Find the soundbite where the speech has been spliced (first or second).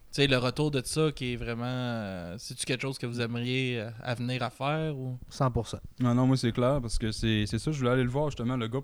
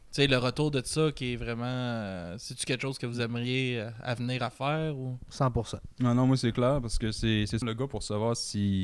second